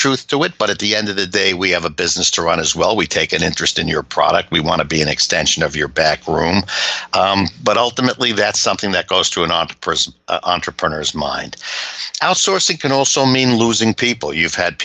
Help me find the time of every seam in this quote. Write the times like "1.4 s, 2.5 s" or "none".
none